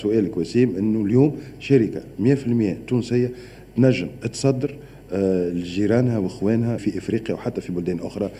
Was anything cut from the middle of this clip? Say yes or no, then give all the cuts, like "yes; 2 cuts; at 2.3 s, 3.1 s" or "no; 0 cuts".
yes; 1 cut; at 6.8 s